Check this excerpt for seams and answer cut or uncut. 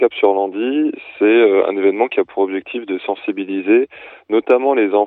uncut